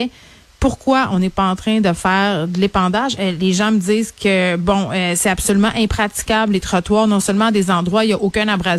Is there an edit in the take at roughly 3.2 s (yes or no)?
yes